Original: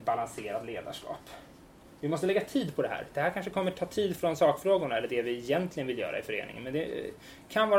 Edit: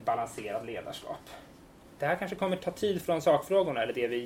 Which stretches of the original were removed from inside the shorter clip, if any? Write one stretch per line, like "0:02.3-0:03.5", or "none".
0:02.0-0:03.1